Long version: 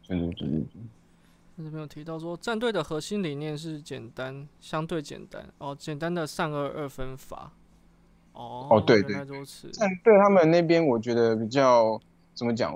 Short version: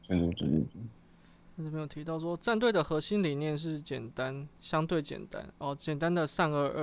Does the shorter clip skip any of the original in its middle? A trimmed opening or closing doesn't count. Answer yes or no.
no